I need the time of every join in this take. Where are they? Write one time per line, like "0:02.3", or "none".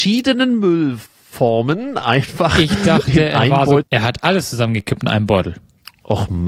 0:03.8